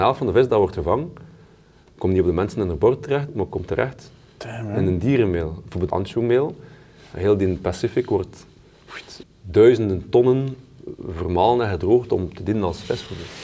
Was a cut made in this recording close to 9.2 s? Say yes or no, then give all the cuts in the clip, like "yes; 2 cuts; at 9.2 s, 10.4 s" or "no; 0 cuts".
yes; 2 cuts; at 5.9 s, 9.2 s